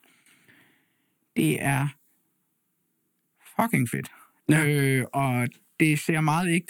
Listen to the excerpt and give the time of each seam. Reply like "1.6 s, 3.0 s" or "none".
none